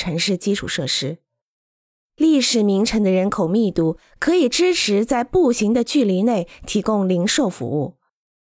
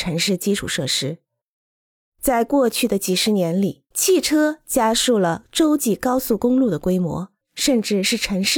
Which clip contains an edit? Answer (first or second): second